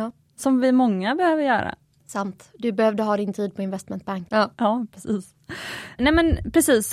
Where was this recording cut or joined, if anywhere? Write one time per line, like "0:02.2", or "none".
0:04.3
0:06.0